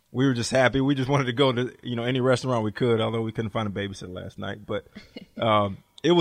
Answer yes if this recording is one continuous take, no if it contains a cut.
yes